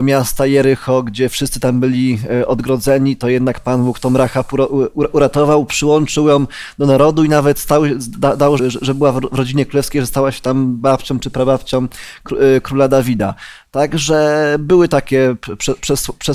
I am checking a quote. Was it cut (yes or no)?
yes